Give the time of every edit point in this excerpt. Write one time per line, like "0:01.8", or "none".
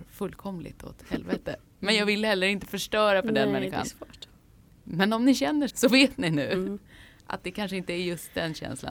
0:05.7